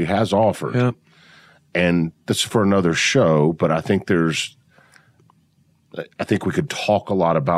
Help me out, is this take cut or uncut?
uncut